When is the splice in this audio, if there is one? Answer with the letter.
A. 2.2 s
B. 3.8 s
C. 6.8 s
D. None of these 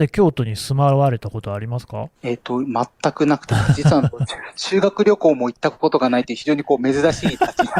A